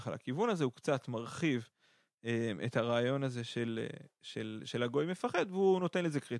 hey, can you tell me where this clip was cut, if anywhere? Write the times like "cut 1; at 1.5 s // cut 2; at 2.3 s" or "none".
none

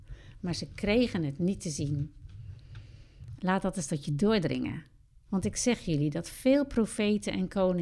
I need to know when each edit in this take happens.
cut 1; at 3.4 s // cut 2; at 5.2 s

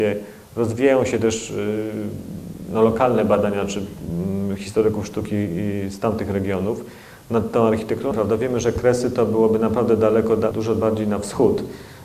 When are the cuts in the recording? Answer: cut 1; at 8.1 s // cut 2; at 10.5 s

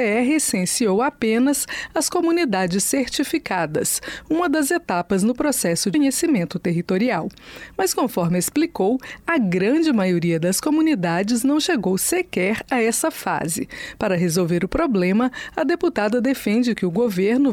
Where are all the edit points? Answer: cut 1; at 5.9 s

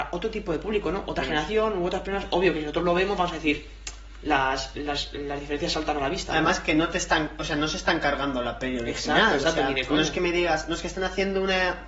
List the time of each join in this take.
none

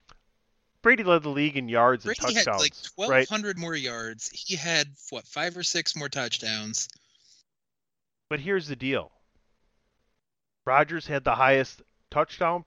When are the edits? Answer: none

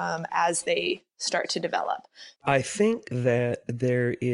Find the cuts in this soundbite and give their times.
cut 1; at 2.4 s

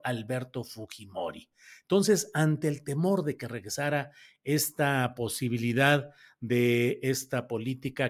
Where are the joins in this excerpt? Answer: none

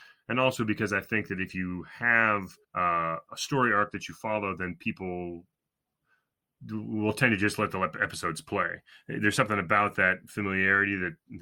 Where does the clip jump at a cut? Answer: cut 1; at 2.6 s

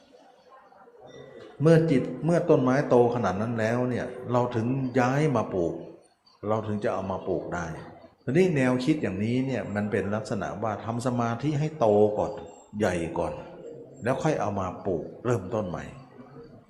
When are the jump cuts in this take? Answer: cut 1; at 8.1 s

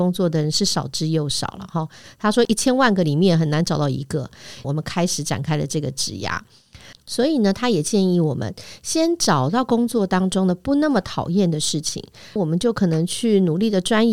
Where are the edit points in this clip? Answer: cut 1; at 4.6 s // cut 2; at 6.9 s // cut 3; at 12.4 s

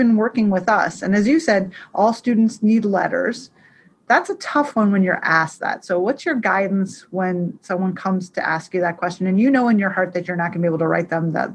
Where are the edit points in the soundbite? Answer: none

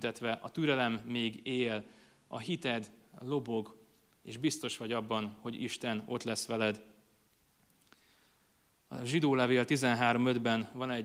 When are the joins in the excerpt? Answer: none

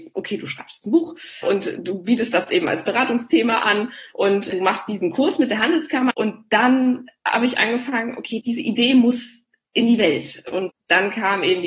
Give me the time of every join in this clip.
cut 1; at 6.1 s // cut 2; at 8.4 s

